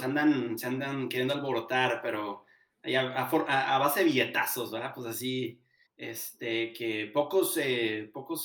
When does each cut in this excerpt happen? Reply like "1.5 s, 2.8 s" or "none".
5.9 s